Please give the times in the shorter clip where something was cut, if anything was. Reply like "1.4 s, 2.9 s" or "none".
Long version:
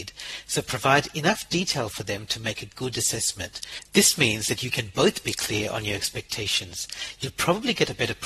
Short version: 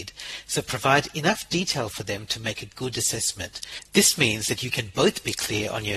none